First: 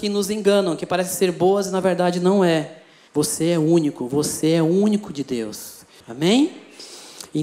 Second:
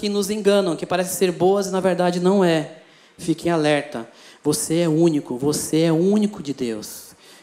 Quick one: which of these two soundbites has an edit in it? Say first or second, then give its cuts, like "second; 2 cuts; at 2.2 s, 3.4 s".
first; 2 cuts; at 3.1 s, 6.0 s